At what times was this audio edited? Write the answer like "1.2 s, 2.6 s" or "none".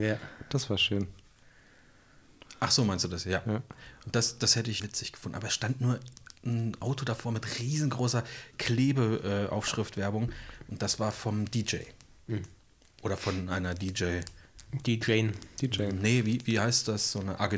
4.8 s